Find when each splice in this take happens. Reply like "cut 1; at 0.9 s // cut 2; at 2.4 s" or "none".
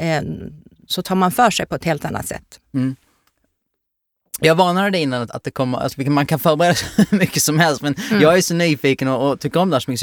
none